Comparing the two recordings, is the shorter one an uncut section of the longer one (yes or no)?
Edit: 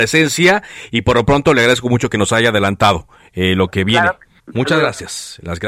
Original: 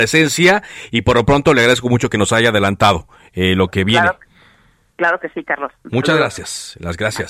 no